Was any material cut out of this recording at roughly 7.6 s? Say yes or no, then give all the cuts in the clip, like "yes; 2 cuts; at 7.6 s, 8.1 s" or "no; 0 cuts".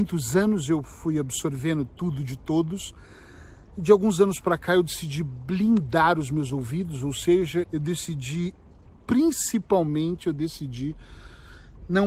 yes; 1 cut; at 7.6 s